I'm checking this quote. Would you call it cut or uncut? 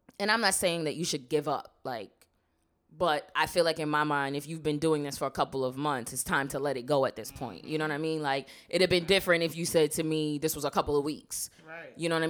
uncut